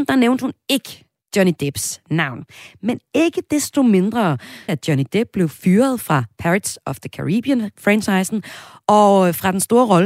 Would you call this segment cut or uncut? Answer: cut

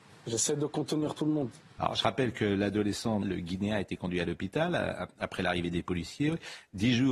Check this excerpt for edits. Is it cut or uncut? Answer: cut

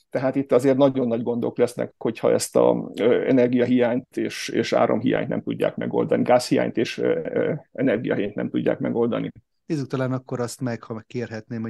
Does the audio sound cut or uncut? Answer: cut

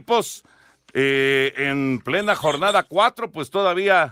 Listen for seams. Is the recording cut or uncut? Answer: uncut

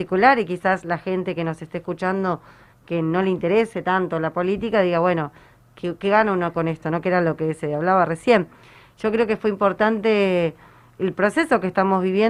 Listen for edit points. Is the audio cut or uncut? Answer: uncut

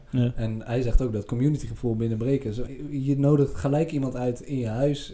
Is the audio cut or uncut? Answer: cut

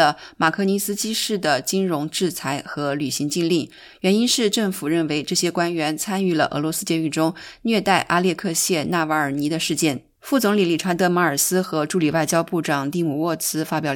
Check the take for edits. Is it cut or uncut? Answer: uncut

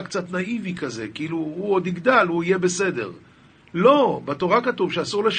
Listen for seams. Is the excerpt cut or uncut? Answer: uncut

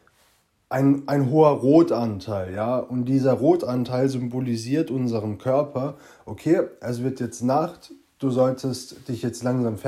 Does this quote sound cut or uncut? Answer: uncut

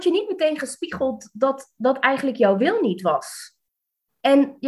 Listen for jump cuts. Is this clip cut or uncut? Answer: uncut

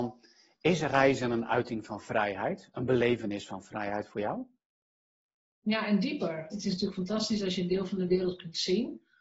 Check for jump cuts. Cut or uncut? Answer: cut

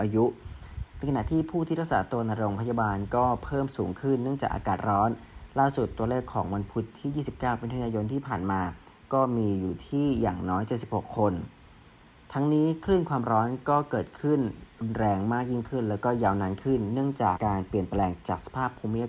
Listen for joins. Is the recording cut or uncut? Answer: cut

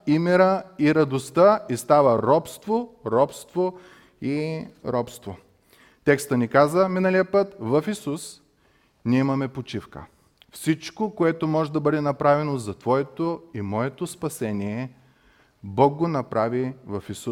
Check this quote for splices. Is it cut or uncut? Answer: uncut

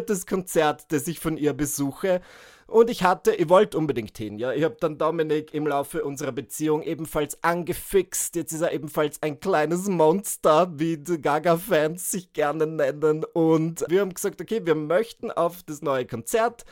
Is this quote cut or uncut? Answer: cut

